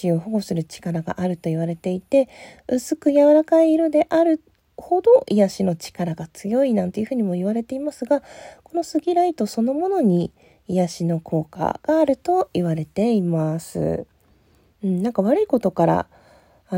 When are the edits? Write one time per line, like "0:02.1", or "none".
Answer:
none